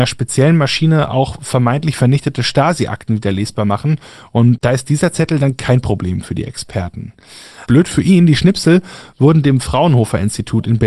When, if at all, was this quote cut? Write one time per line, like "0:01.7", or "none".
0:07.7